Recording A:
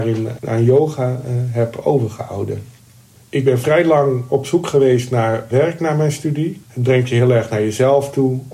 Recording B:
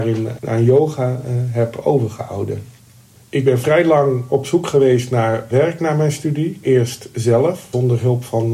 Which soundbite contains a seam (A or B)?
A